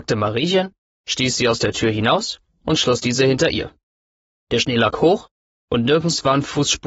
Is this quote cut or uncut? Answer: cut